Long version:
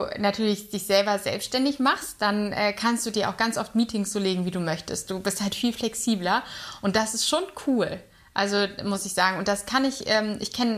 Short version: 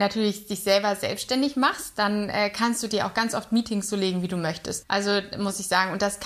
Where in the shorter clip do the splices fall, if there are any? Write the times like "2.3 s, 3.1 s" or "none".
4.8 s